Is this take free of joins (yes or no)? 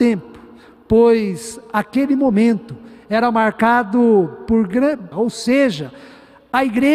no